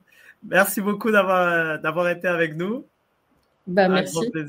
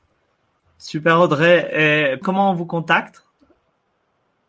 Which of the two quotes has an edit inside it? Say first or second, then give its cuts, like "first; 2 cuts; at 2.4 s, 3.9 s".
second; 1 cut; at 2.2 s